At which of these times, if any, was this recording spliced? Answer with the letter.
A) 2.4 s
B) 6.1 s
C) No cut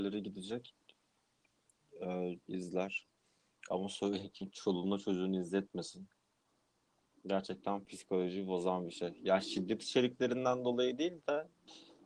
A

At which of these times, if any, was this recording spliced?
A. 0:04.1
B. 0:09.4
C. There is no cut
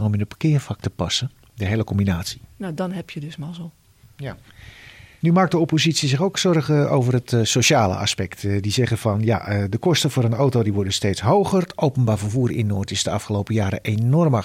C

